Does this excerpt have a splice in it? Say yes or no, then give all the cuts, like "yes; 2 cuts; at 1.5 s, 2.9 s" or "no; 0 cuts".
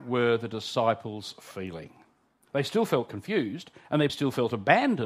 yes; 1 cut; at 4.1 s